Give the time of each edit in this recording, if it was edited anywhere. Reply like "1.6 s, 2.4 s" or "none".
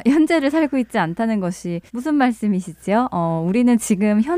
1.9 s